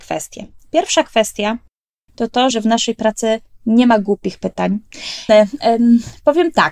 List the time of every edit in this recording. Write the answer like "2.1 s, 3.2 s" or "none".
2.5 s, 5.3 s